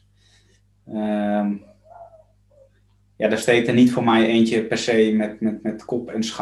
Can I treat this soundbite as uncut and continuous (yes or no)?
yes